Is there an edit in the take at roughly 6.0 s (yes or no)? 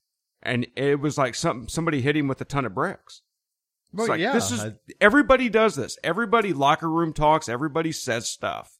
no